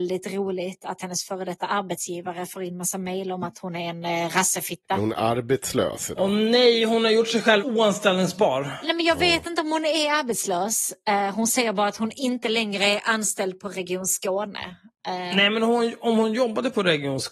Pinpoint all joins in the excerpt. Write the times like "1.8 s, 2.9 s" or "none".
none